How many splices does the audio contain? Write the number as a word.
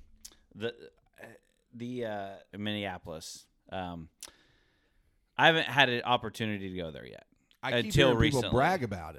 one